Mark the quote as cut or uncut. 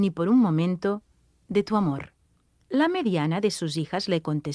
cut